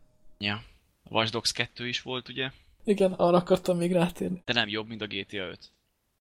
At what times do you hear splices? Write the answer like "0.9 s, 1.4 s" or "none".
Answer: 4.4 s